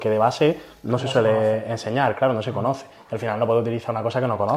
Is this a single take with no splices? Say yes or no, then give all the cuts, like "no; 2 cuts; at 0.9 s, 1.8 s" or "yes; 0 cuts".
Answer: yes; 0 cuts